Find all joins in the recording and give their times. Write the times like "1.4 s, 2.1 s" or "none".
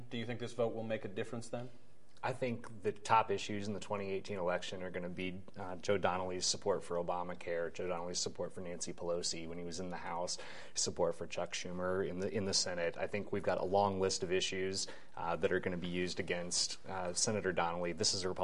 none